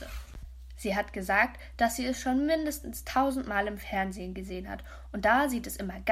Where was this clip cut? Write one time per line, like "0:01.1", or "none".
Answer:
none